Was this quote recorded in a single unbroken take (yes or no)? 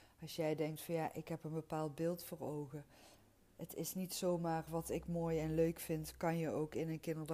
yes